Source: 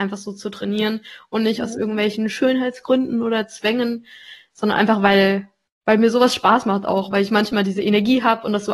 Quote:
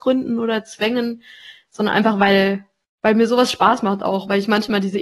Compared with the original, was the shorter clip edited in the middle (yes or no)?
no